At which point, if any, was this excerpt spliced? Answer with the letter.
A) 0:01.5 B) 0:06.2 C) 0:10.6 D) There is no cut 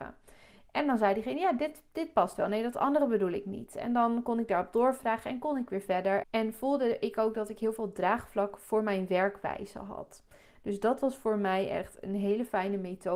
B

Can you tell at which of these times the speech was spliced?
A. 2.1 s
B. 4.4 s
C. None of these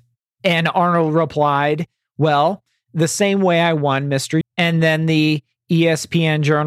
B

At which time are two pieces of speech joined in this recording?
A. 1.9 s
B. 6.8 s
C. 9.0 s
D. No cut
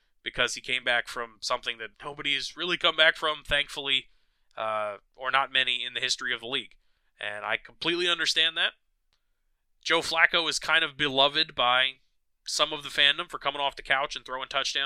A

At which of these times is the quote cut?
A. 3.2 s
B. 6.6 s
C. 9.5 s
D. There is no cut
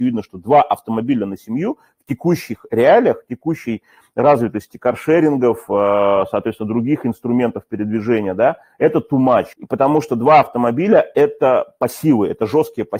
C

